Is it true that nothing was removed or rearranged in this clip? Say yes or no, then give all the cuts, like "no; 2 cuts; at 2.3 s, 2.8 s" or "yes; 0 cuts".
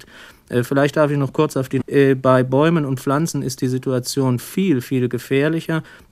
no; 1 cut; at 1.8 s